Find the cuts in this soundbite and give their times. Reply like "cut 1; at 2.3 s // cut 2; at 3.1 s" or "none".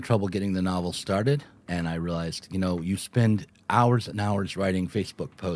cut 1; at 1.6 s